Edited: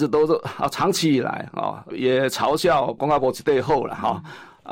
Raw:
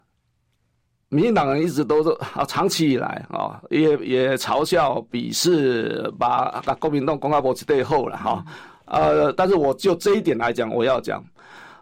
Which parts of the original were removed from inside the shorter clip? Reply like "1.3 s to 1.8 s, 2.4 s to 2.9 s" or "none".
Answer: 3.7 s to 4.0 s, 5.1 s to 7.2 s